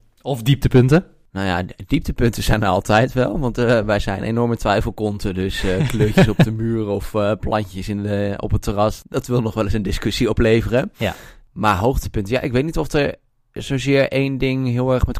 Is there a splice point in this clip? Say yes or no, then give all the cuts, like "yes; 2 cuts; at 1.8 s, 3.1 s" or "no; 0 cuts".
no; 0 cuts